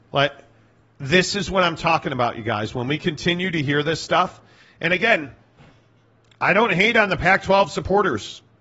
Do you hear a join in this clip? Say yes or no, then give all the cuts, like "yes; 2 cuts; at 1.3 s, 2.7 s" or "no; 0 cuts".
no; 0 cuts